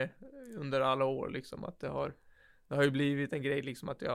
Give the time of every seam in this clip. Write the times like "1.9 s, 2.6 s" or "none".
none